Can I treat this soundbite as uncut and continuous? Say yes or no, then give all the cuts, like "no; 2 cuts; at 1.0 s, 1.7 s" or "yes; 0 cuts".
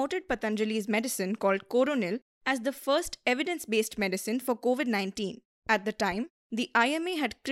no; 1 cut; at 5.5 s